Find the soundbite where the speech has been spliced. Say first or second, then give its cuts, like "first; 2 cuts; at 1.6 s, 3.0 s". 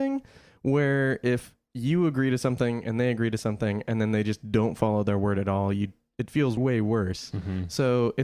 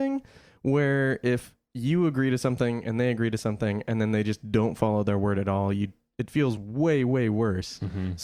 first; 1 cut; at 6.6 s